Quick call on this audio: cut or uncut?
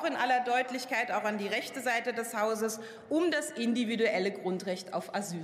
uncut